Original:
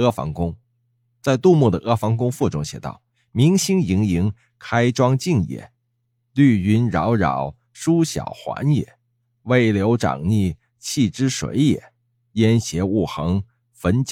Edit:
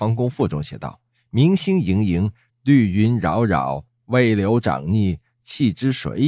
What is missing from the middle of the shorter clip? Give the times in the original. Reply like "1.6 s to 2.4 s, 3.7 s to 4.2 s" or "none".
4.5 s to 6.2 s, 7.6 s to 9.2 s